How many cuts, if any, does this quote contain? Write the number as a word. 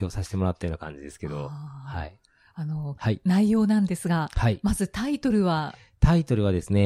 one